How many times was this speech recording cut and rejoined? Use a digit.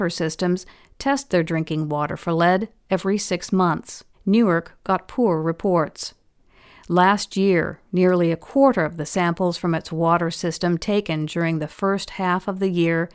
1